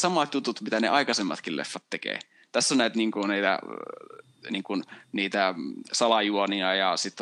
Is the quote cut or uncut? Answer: uncut